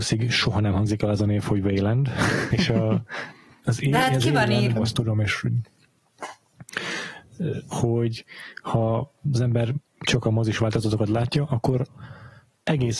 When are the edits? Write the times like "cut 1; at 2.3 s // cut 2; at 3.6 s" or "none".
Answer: cut 1; at 2.5 s // cut 2; at 4.8 s // cut 3; at 7.7 s

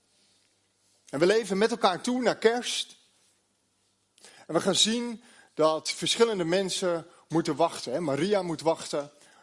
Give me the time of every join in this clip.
none

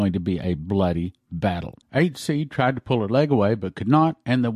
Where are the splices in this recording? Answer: none

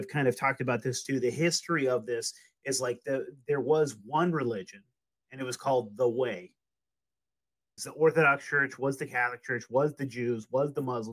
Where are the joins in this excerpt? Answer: cut 1; at 7.8 s

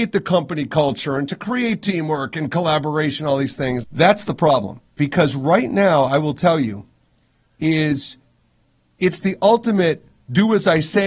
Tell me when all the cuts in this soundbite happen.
cut 1; at 3.8 s

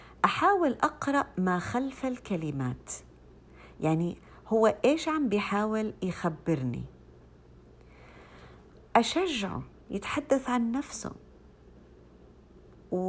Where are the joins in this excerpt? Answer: none

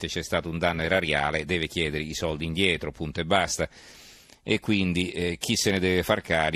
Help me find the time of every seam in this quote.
none

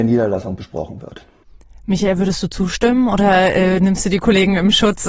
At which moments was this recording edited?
none

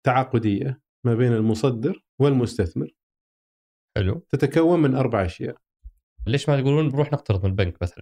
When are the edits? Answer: cut 1; at 2.1 s // cut 2; at 6.3 s

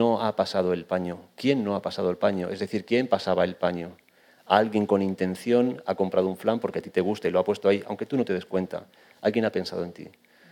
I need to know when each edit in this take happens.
none

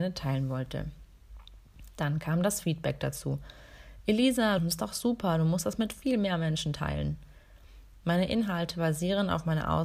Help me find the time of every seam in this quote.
cut 1; at 4.6 s // cut 2; at 7.9 s

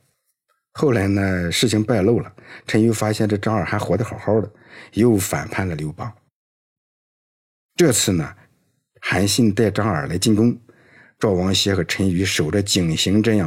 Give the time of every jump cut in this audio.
none

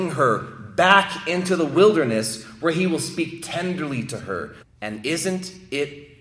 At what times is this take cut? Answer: cut 1; at 4.6 s

